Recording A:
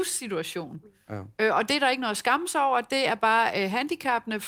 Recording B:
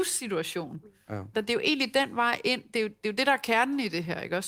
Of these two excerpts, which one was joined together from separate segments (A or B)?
B